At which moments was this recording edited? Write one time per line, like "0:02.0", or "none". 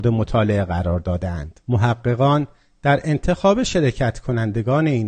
0:01.6